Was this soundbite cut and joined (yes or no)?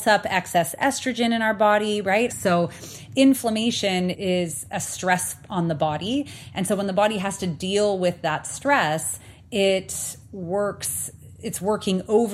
yes